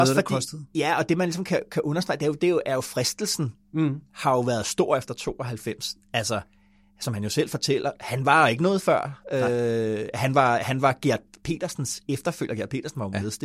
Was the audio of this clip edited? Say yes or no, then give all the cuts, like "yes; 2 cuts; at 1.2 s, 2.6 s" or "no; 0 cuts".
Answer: no; 0 cuts